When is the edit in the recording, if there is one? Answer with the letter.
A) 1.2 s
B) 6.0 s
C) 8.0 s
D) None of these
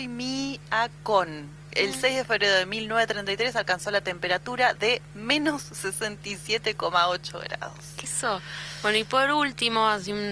C